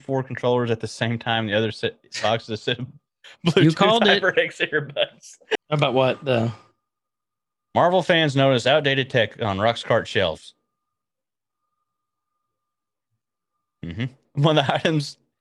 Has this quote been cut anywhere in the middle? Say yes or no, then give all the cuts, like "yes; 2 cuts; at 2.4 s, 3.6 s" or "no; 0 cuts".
yes; 2 cuts; at 5.6 s, 14.2 s